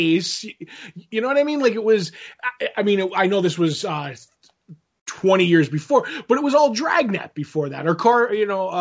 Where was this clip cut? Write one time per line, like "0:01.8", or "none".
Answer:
none